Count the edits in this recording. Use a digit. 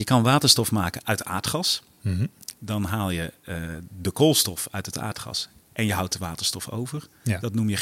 0